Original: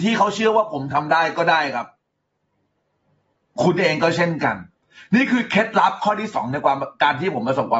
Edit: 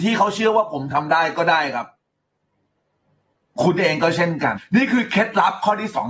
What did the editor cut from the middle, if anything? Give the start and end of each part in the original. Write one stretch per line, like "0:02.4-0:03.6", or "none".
0:04.6-0:05.0